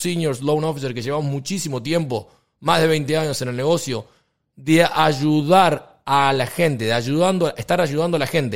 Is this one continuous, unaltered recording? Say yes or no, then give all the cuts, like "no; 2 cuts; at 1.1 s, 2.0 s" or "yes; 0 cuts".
yes; 0 cuts